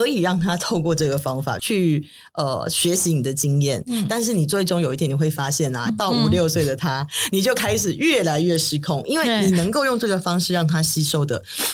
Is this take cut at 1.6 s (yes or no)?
yes